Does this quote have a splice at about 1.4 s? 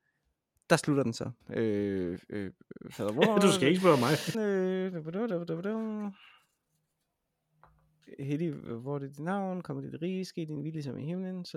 yes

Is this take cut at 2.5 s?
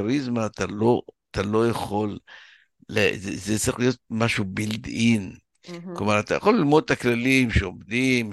no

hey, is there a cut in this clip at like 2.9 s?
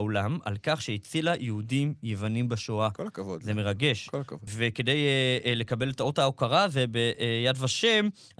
no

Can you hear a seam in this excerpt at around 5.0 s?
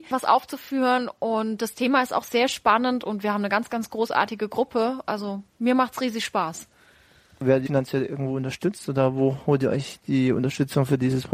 no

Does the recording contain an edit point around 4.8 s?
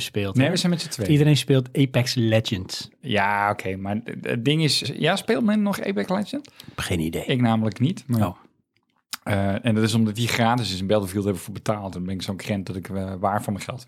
yes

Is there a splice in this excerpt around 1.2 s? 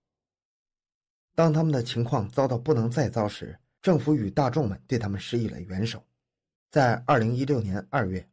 no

